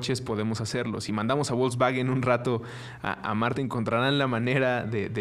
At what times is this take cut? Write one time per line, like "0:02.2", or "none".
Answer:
none